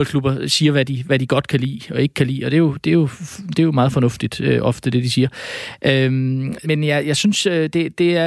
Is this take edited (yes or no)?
yes